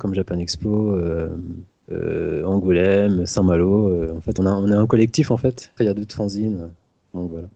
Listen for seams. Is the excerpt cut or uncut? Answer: cut